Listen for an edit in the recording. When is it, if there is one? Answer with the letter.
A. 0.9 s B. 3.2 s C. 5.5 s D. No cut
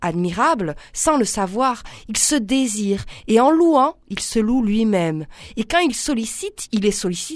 D